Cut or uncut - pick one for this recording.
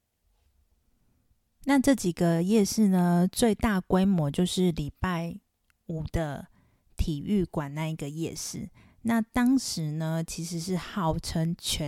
uncut